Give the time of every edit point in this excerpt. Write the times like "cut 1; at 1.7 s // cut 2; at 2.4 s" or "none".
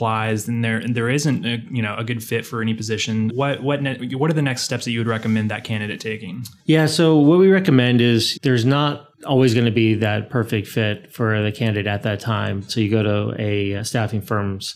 cut 1; at 6.6 s // cut 2; at 12.7 s // cut 3; at 13.8 s